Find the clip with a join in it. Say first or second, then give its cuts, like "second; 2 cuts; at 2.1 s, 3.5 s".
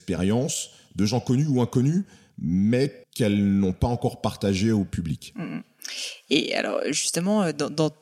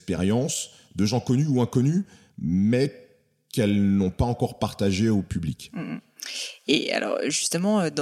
first; 1 cut; at 3.0 s